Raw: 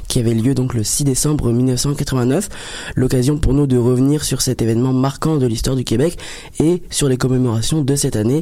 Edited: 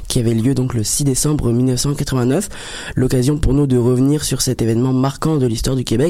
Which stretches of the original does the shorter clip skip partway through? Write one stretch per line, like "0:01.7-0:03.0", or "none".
none